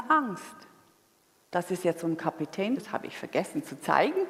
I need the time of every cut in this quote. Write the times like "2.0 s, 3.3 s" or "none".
1.4 s, 2.7 s

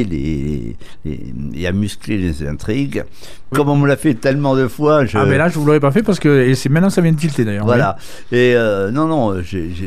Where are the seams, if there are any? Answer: 3.5 s

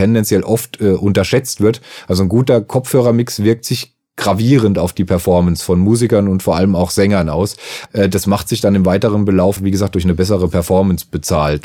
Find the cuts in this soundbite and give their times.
7.9 s, 9.6 s

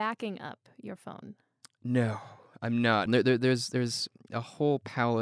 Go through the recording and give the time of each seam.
3.1 s

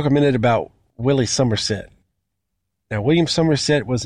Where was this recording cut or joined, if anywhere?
none

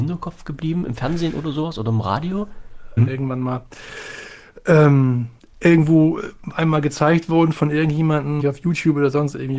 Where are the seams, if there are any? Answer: 3.0 s, 5.4 s, 8.4 s

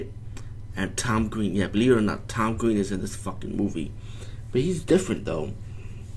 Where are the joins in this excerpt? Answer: none

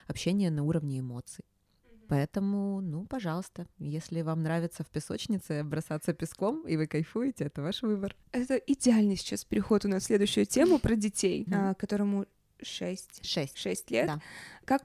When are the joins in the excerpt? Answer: 8.2 s, 11.5 s

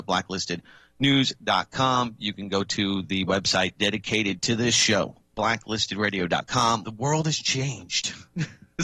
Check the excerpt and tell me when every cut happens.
6.8 s

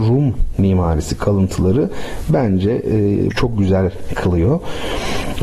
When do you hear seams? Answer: 3.3 s

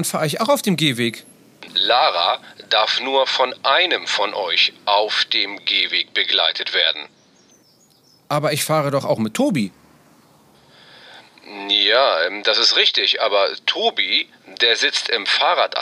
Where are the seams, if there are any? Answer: 1.7 s

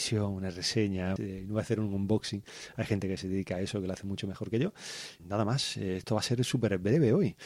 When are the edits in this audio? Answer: 1.2 s, 5.2 s

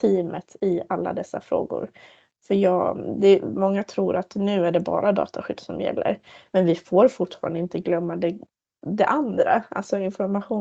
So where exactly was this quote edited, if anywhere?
none

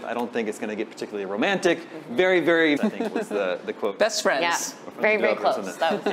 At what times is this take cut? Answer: 2.8 s

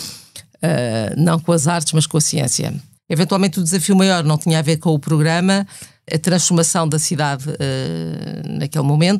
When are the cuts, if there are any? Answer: 3.0 s, 6.1 s

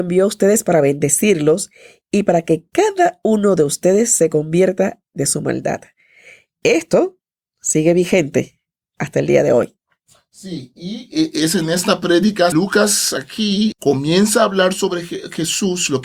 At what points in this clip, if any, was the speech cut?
12.5 s, 13.7 s

